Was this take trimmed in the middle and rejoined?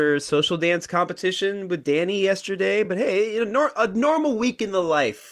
no; 0 cuts

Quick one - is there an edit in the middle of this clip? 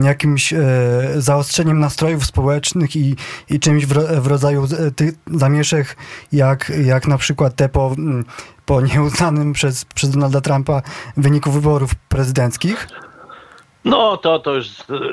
no; 0 cuts

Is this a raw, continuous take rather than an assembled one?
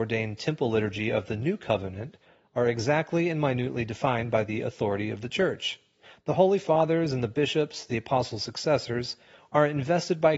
yes; 0 cuts

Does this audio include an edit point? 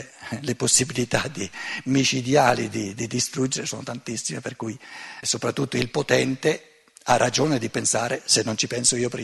yes; 1 cut; at 5.2 s

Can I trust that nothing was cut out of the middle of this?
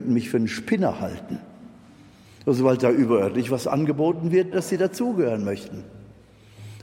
no; 2 cuts; at 2.2 s, 4.5 s

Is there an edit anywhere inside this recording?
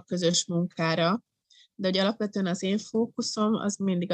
no; 0 cuts

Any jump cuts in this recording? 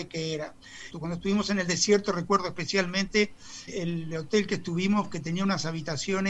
yes; 2 cuts; at 0.9 s, 3.7 s

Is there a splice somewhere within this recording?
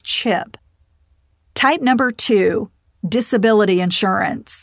no; 0 cuts

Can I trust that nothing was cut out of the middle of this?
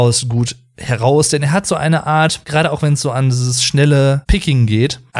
yes; 0 cuts

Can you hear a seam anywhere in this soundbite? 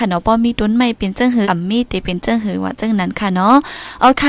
yes; 1 cut; at 1.4 s

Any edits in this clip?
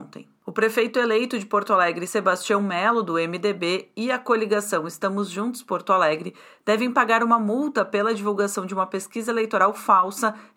no; 0 cuts

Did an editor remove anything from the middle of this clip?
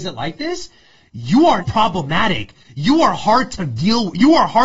yes; 1 cut; at 1.6 s

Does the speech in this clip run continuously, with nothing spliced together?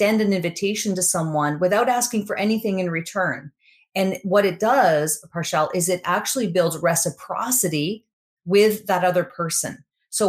yes; 0 cuts

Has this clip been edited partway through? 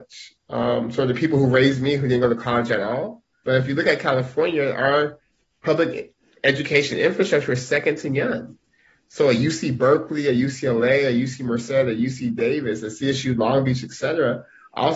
yes; 1 cut; at 3.4 s

